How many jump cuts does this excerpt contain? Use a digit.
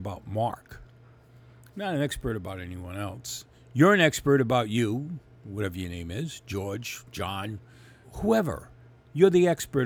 1